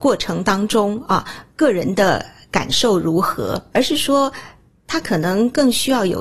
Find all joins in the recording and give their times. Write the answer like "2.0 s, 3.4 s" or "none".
none